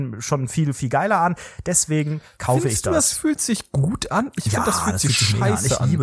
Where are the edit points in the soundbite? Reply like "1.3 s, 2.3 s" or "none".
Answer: none